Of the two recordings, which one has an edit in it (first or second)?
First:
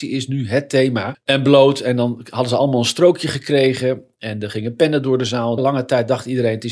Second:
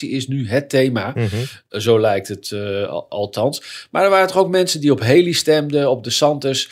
first